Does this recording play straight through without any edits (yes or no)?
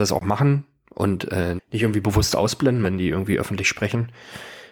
no